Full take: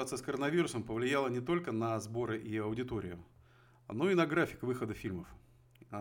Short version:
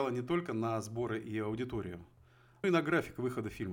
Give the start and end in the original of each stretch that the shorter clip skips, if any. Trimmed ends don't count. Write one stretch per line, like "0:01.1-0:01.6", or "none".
0:03.8-0:04.1